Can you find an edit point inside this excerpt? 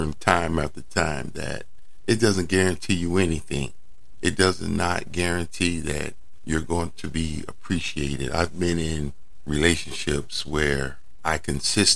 no; 0 cuts

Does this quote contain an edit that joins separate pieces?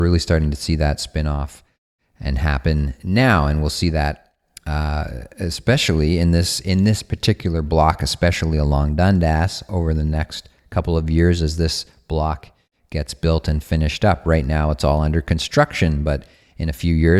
no; 0 cuts

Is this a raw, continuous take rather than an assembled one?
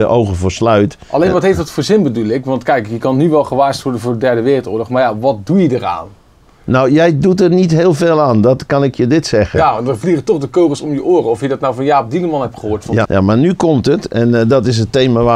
no; 1 cut; at 13.0 s

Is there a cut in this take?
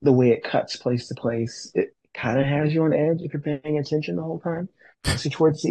no; 0 cuts

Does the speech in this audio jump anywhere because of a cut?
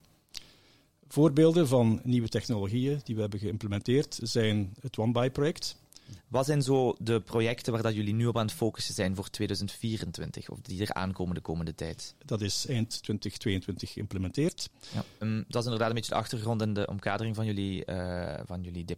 yes; 3 cuts; at 6.2 s, 12.2 s, 15.2 s

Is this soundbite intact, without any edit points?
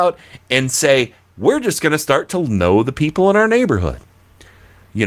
no; 1 cut; at 1.3 s

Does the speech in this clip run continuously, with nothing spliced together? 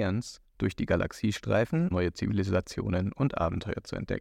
no; 1 cut; at 1.9 s

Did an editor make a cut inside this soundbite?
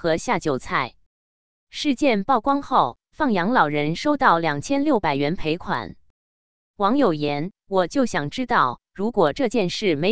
no; 0 cuts

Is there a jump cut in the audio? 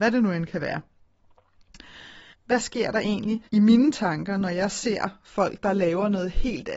yes; 2 cuts; at 2.3 s, 3.5 s

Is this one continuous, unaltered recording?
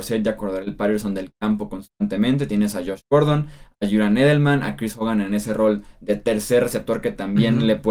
yes; 0 cuts

